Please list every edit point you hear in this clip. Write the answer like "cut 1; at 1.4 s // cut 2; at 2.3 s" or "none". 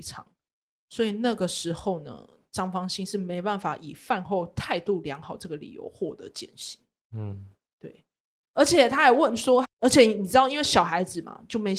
cut 1; at 8.4 s // cut 2; at 9.6 s